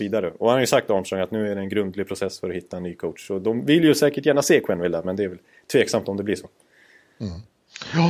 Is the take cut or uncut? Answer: uncut